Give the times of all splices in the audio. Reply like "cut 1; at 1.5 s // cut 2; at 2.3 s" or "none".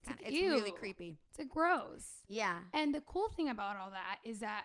cut 1; at 1.3 s